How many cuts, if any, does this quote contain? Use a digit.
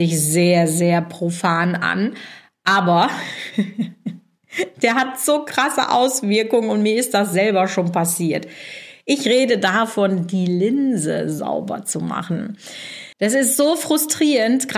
1